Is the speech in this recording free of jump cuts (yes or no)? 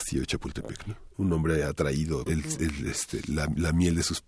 no